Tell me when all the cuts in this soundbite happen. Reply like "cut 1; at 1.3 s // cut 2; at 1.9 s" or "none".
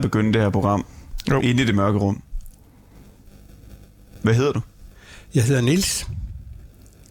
none